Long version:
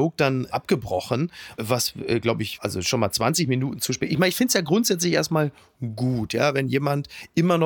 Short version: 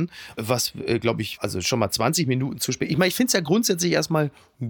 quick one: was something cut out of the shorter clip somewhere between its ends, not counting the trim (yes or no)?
no